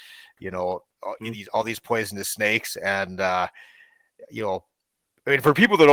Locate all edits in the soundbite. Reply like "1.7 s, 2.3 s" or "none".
none